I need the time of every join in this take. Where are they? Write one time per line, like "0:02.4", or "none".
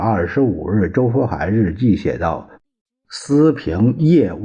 none